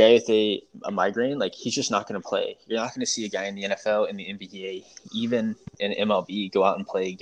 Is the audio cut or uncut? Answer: uncut